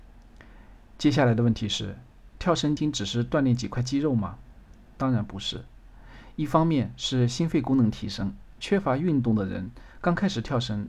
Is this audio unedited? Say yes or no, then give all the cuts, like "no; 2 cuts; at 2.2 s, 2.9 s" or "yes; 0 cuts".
no; 1 cut; at 2.8 s